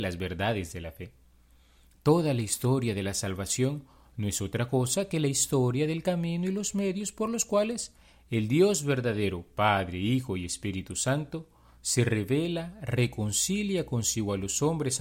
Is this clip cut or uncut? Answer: uncut